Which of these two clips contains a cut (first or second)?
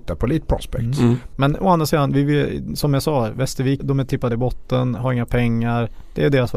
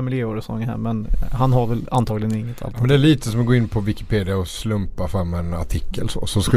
first